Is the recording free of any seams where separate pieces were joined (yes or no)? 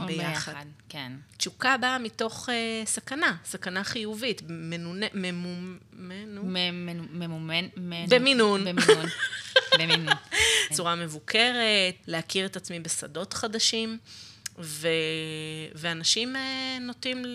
no